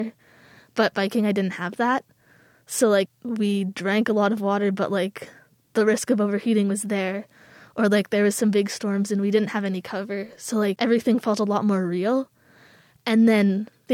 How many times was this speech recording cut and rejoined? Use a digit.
1